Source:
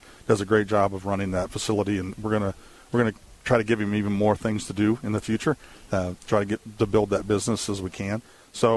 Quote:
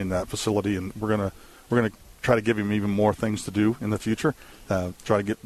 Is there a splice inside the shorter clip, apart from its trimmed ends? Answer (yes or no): no